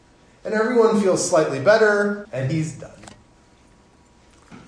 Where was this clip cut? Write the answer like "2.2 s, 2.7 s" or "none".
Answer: 2.2 s